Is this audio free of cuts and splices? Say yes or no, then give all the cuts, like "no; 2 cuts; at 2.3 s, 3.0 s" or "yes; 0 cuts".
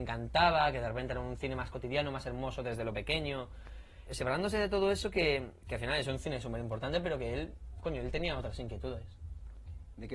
no; 1 cut; at 4.1 s